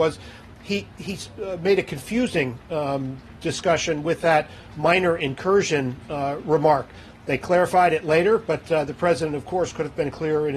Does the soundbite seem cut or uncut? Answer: uncut